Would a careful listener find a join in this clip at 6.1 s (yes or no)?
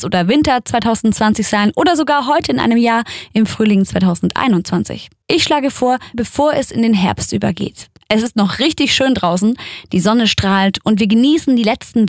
yes